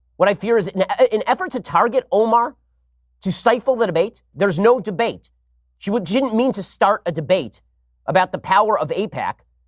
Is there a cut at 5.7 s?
no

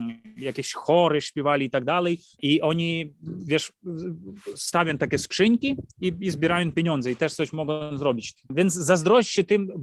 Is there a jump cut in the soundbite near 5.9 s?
no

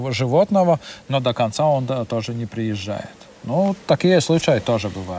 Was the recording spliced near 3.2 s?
no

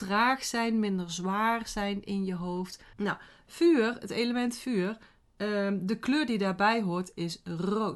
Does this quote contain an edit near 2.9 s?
yes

